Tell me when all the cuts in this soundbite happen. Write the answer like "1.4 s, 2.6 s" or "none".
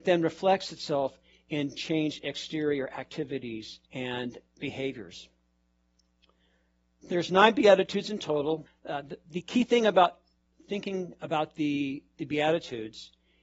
3.9 s, 8.7 s